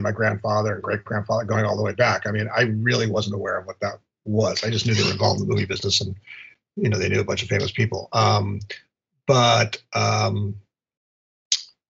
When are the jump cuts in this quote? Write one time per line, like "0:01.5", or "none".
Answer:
none